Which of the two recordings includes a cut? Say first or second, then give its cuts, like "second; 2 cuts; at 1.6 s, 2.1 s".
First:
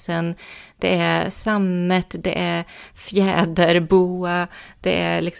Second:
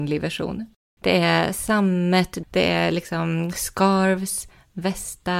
second; 2 cuts; at 1.0 s, 2.4 s